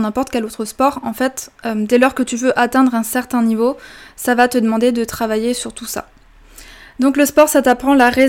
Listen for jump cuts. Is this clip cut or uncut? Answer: uncut